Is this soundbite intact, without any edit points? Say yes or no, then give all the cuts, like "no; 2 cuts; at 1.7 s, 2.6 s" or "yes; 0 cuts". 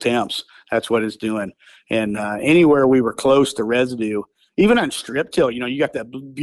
yes; 0 cuts